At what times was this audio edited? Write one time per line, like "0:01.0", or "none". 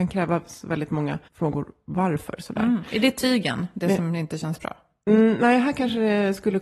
0:01.2